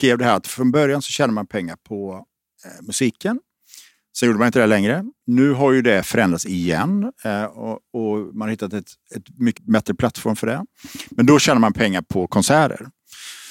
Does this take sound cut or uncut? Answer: cut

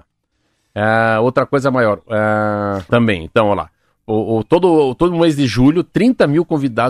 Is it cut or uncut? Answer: cut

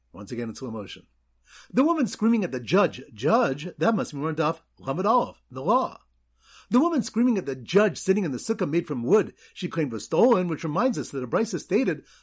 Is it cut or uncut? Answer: uncut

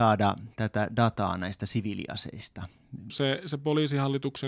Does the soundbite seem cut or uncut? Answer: cut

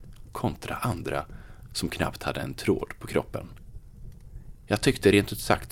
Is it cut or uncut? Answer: cut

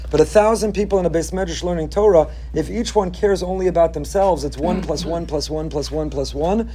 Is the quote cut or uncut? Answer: uncut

